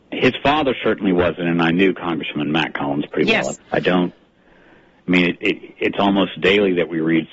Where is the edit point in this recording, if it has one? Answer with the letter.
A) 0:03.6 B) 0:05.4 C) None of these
A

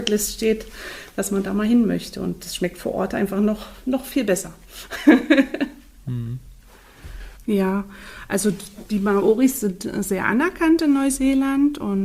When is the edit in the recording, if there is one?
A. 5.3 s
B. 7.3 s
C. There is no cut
B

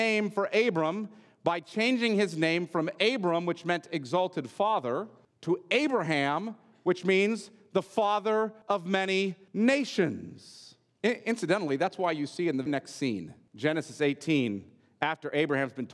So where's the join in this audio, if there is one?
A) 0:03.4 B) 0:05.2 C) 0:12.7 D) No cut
C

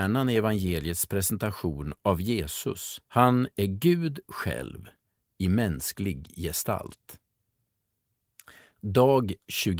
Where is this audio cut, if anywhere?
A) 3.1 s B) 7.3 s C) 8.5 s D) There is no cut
A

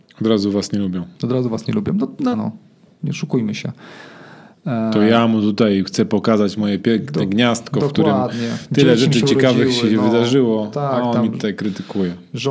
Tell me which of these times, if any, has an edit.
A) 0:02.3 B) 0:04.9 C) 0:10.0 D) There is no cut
A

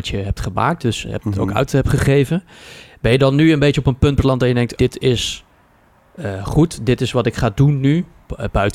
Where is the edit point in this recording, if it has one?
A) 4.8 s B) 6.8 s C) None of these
A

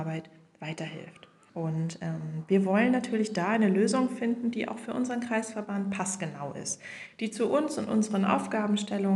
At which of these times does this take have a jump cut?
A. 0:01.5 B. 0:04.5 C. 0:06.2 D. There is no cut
A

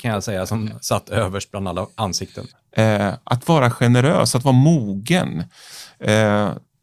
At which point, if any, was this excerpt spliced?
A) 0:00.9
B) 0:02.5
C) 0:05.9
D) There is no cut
B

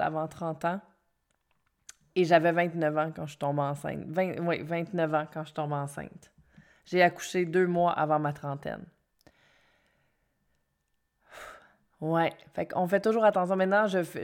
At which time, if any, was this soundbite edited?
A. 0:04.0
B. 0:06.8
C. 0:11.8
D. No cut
D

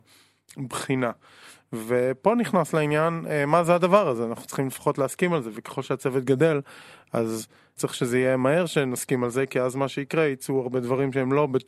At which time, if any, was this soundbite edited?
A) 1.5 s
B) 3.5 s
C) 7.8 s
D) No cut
C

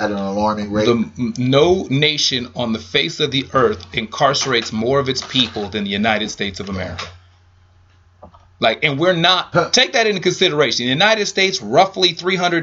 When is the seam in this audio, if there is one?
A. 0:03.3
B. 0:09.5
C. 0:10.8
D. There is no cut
B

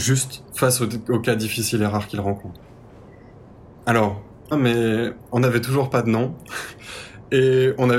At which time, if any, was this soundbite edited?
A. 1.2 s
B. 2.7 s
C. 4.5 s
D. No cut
C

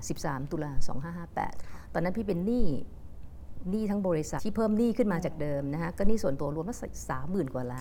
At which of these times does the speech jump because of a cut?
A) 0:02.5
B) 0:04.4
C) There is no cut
B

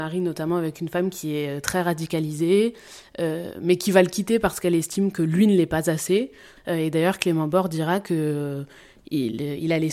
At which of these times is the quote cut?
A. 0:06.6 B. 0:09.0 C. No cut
A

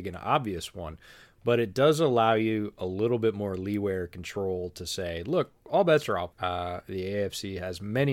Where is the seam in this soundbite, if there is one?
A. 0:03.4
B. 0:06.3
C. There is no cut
B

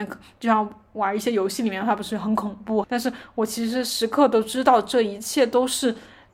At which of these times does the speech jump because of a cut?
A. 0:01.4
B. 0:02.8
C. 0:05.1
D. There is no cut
B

